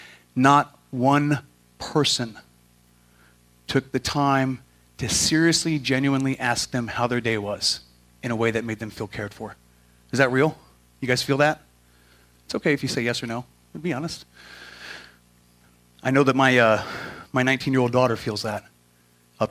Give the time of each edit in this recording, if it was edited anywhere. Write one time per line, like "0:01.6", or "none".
none